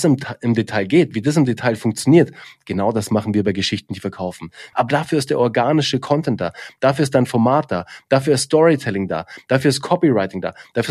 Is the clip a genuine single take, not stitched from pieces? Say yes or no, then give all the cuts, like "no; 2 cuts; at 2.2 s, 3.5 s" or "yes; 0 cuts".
no; 1 cut; at 4.7 s